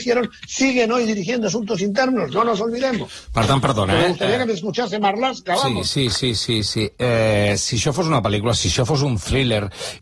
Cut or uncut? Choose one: uncut